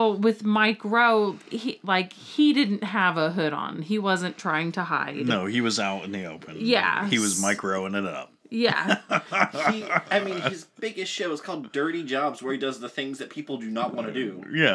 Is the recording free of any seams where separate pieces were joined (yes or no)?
yes